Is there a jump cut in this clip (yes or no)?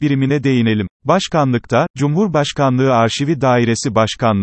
yes